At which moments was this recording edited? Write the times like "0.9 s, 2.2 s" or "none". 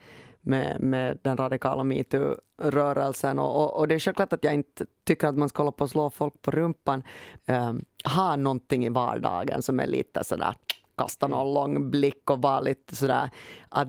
7.4 s